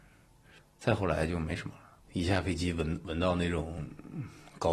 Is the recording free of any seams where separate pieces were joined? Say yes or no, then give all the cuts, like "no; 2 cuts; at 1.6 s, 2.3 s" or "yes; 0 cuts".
no; 1 cut; at 2.0 s